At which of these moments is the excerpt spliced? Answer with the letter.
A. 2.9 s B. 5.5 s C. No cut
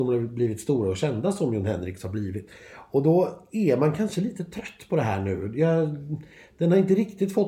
C